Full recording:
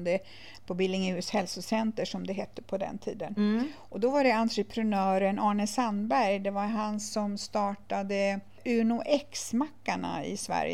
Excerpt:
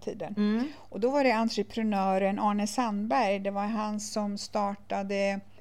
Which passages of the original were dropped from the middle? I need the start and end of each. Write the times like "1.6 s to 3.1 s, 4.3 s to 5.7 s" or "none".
none

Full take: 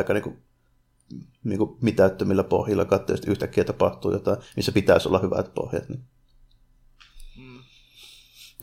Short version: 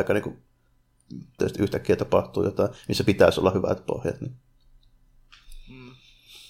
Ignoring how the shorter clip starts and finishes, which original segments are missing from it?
1.4 s to 3.1 s

